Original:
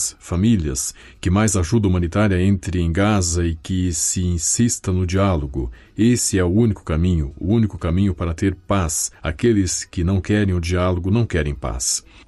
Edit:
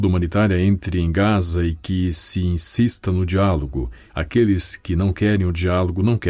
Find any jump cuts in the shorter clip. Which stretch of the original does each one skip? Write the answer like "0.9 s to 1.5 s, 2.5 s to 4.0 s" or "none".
5.9 s to 9.2 s